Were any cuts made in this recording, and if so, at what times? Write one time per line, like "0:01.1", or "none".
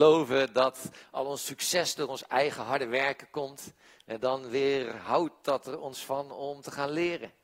none